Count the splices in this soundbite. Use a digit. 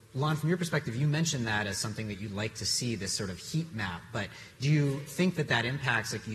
0